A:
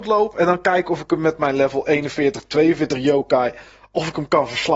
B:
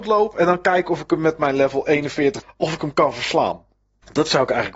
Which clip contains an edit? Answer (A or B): B